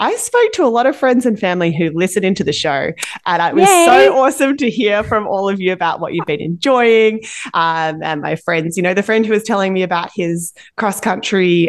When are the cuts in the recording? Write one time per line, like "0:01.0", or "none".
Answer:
none